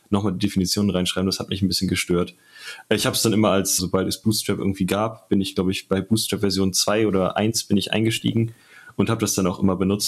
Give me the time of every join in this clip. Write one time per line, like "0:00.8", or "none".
0:03.8